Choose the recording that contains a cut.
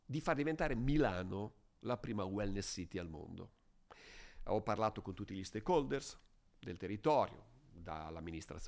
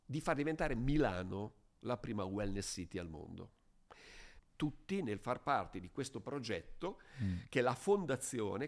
second; 1 cut; at 4.4 s

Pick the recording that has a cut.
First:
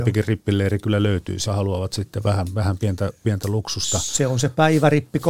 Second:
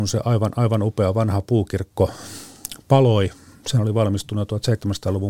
first; 1 cut; at 1.5 s

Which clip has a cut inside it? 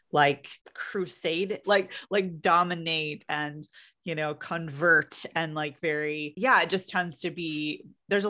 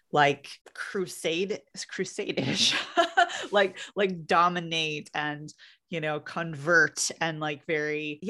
first; 1 cut; at 1.6 s

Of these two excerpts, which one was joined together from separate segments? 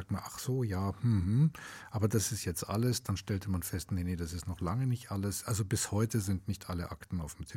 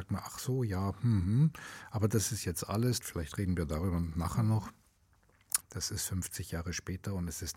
second; 2 cuts; at 3.0 s, 5.6 s

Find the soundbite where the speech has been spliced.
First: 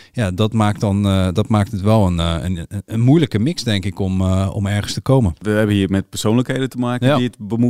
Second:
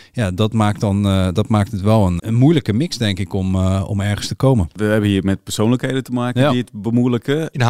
second; 1 cut; at 2.2 s

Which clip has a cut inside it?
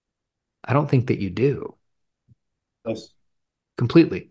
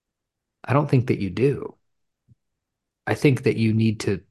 first; 1 cut; at 2.8 s

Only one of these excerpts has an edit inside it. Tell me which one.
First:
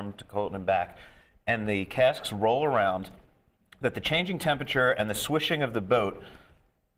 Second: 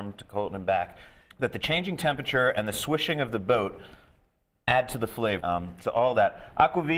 second; 2 cuts; at 1.3 s, 5.4 s

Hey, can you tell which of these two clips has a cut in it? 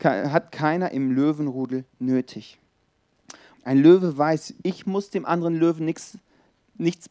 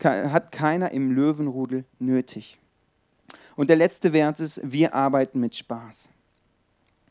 first; 1 cut; at 3.5 s

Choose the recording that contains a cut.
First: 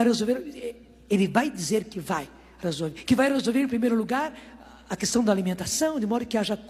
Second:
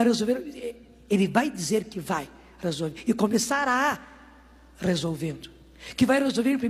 first; 1 cut; at 3.0 s

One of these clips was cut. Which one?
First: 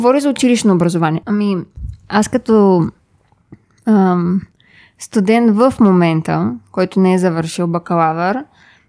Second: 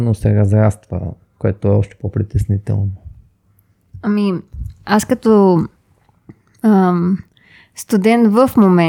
first; 1 cut; at 1.2 s

